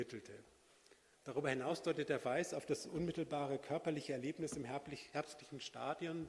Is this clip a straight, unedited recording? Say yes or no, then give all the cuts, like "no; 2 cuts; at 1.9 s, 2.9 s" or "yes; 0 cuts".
no; 1 cut; at 1.1 s